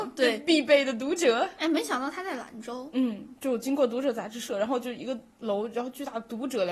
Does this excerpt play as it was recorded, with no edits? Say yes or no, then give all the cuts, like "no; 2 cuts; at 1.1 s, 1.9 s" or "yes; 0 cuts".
yes; 0 cuts